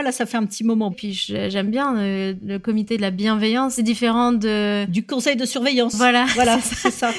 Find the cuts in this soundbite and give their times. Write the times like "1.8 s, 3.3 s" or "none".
0.9 s